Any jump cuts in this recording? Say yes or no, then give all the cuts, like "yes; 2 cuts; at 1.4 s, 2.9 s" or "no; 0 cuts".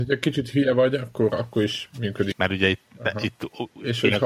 yes; 1 cut; at 2.3 s